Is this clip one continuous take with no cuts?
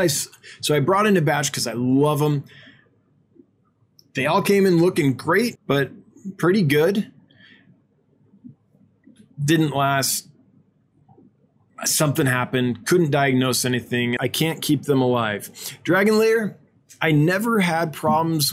no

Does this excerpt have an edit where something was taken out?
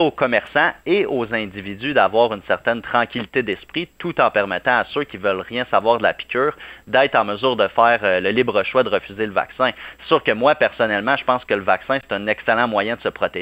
no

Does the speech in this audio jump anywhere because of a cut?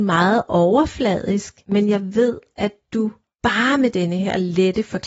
no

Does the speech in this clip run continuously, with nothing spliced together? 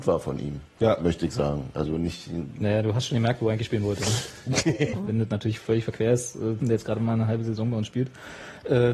no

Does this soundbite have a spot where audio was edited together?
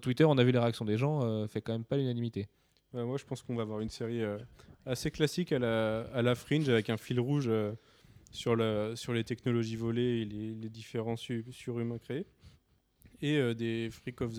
no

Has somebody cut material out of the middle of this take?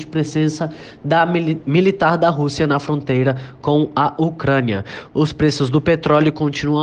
no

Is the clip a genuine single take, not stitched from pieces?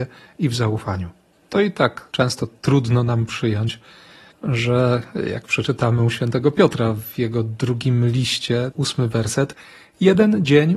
no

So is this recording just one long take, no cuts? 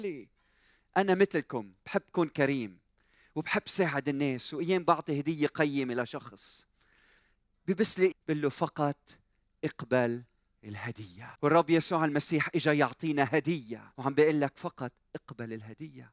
no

